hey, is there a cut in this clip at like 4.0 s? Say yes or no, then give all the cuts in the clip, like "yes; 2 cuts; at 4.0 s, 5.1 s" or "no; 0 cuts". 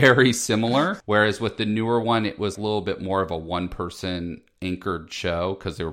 no; 2 cuts; at 1.0 s, 2.6 s